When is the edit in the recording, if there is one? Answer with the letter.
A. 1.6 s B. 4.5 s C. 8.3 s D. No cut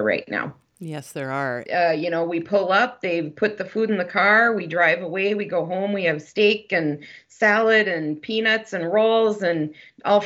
A